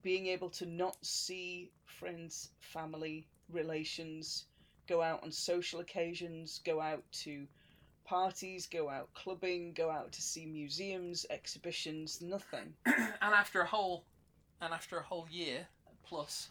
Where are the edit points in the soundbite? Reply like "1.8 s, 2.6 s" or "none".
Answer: 12.2 s

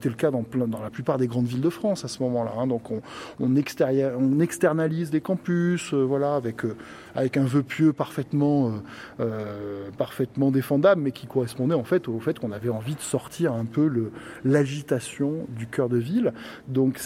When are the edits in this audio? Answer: none

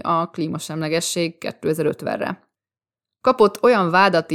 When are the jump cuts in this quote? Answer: none

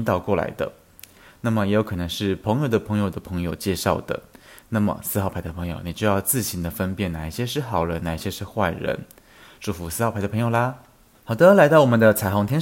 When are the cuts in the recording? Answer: none

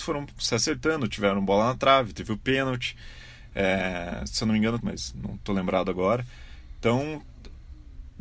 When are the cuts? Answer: 4.8 s

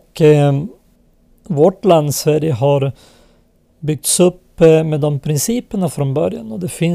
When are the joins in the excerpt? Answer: none

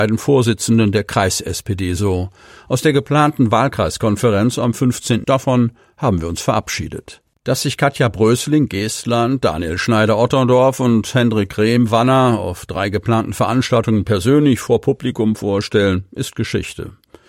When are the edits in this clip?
5.2 s, 7.3 s

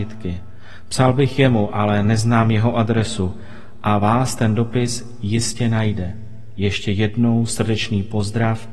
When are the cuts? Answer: none

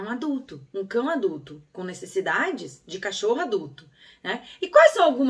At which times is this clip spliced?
none

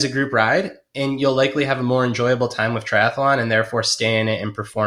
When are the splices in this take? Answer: none

